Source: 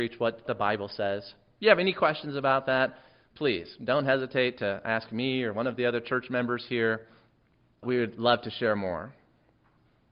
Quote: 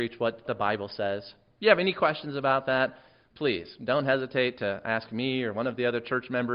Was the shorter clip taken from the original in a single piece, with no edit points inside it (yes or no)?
yes